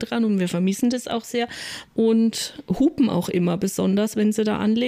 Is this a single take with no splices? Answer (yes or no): no